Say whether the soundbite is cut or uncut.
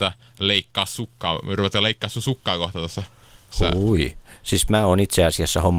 uncut